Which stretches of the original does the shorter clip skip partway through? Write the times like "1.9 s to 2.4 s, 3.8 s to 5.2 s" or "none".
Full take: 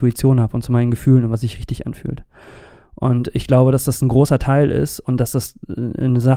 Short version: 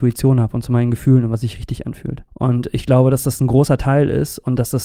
2.3 s to 2.9 s